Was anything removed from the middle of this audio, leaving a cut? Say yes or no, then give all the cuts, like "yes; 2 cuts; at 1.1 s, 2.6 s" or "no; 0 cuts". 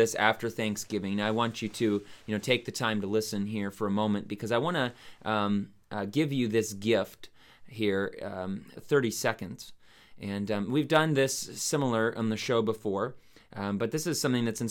yes; 1 cut; at 8.8 s